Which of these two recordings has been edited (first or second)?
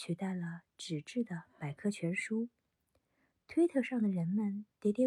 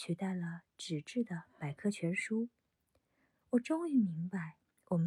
second